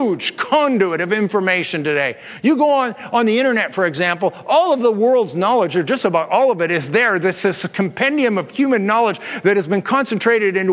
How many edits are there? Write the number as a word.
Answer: zero